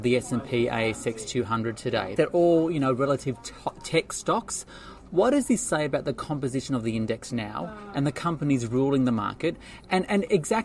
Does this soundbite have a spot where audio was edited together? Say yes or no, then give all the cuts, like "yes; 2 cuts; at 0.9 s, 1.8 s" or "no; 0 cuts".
yes; 1 cut; at 2.2 s